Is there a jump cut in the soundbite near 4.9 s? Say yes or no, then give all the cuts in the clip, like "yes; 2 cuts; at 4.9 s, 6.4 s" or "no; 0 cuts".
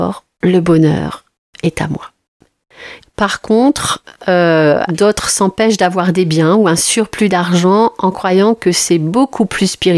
yes; 2 cuts; at 3.0 s, 4.9 s